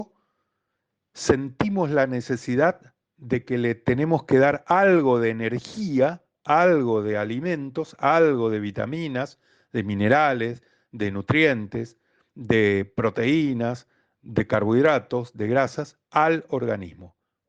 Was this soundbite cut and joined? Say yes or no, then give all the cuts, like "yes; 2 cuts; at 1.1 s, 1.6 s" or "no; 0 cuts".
no; 0 cuts